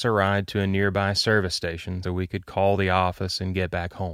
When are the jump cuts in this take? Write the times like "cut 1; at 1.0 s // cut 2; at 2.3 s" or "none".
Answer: cut 1; at 2.0 s

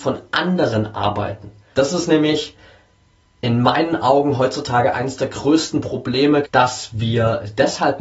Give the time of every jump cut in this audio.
cut 1; at 1.7 s // cut 2; at 6.4 s

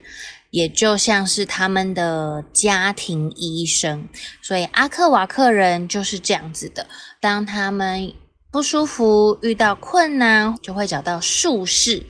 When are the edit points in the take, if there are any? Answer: cut 1; at 10.5 s

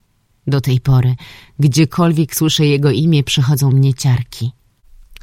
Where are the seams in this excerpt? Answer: none

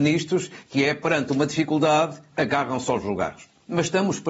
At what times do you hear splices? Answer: cut 1; at 2.3 s

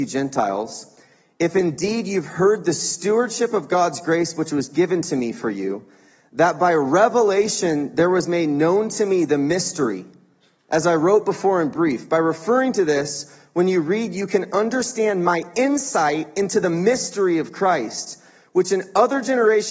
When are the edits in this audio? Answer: none

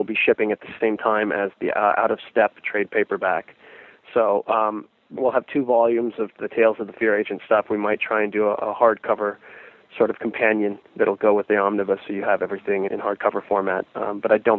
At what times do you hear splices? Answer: cut 1; at 5.2 s // cut 2; at 12.9 s

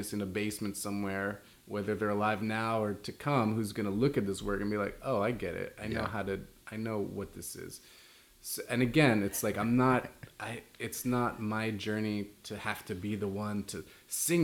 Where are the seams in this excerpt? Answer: none

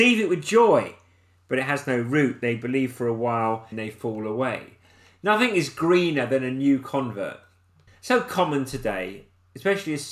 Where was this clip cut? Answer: cut 1; at 3.7 s // cut 2; at 7.9 s

